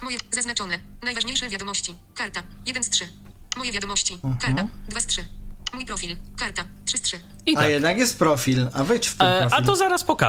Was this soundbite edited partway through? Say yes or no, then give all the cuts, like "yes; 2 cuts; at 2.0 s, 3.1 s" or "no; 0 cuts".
no; 0 cuts